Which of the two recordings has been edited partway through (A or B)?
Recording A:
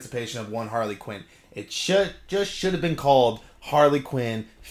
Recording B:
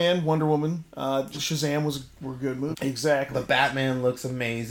B